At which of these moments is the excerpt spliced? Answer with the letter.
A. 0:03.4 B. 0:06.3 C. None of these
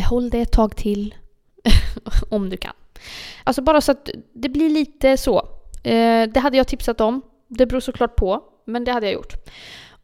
A